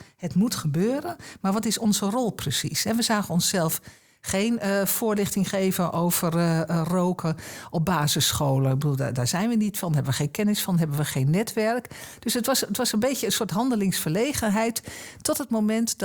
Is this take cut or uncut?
uncut